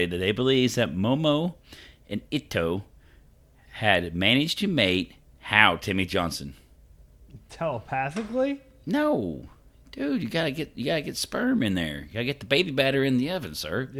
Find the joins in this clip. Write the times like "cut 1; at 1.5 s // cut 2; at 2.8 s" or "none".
none